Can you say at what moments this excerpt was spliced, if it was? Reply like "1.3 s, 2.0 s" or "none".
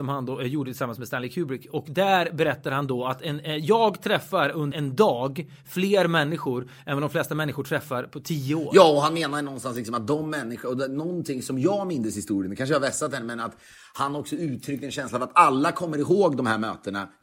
4.7 s